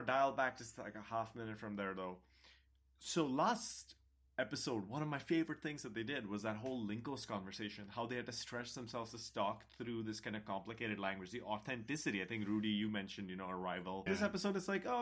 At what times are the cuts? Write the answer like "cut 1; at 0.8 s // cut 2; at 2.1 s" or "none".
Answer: cut 1; at 14.1 s